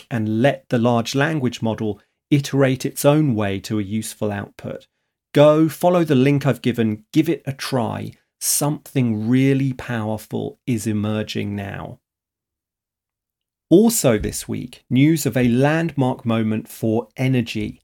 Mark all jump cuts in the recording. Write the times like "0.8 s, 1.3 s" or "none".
13.6 s